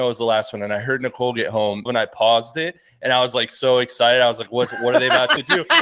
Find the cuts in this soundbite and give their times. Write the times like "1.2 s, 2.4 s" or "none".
1.9 s